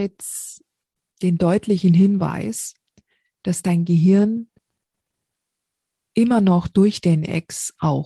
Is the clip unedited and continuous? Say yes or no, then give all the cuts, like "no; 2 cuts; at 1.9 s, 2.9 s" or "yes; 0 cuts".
yes; 0 cuts